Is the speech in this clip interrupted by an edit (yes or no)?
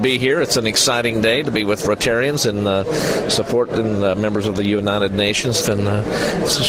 yes